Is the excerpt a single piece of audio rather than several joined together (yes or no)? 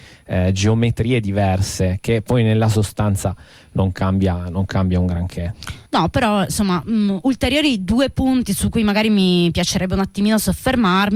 no